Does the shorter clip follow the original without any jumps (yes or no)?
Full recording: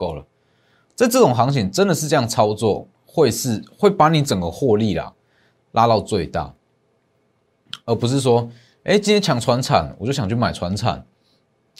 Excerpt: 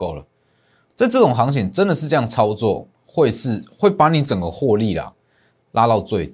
yes